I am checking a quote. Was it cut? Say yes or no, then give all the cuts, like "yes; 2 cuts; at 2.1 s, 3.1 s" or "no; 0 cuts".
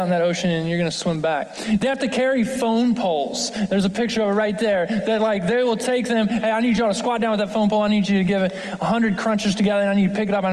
no; 0 cuts